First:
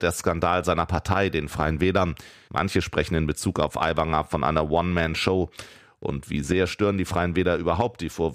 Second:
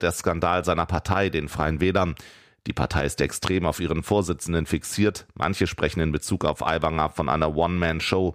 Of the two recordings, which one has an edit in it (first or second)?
first